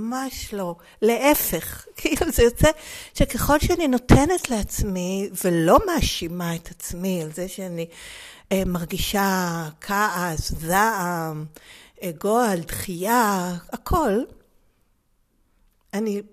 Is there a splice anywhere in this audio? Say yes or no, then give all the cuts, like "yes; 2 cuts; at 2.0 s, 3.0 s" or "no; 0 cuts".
no; 0 cuts